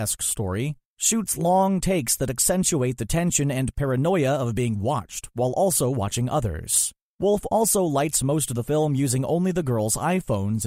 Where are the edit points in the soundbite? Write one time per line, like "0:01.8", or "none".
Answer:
none